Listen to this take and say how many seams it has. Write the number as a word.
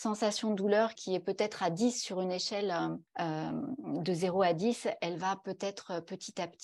two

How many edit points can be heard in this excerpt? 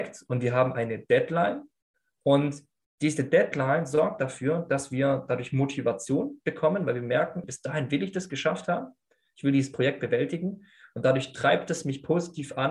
one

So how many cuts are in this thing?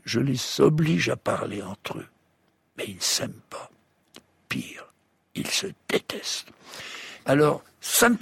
zero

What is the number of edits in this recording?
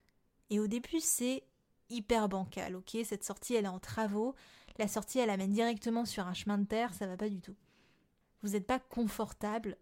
zero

